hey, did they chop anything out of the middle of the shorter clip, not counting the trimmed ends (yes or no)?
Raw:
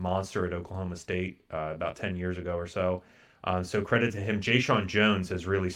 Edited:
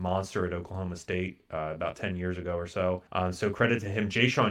yes